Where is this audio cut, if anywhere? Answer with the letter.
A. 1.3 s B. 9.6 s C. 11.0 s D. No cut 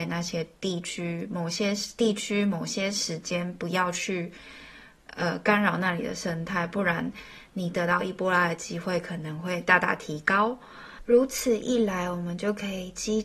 D